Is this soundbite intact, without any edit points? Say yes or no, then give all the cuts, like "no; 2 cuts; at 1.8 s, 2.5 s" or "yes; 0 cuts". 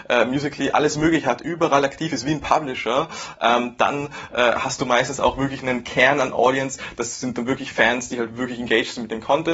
yes; 0 cuts